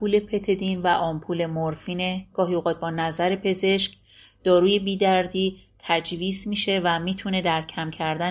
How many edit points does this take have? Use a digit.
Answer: 0